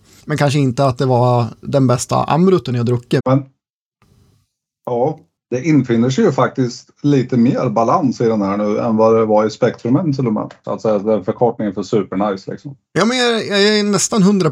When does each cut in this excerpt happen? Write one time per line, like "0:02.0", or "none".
0:03.2
0:10.6